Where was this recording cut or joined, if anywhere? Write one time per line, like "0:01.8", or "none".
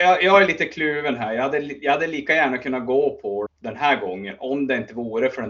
0:03.5